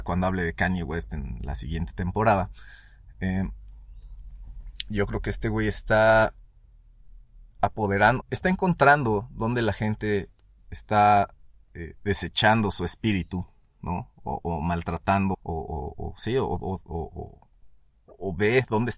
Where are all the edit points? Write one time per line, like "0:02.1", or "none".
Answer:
0:08.2
0:15.3